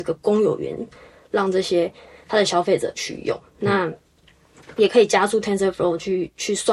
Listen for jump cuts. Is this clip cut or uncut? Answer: uncut